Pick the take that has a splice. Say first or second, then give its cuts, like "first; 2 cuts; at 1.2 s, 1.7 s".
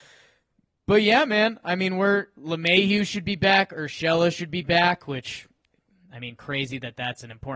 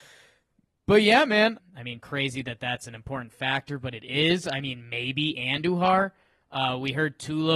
second; 1 cut; at 1.6 s